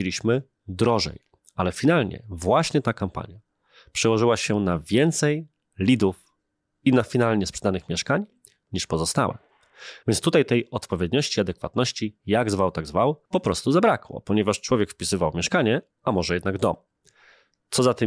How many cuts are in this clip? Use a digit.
3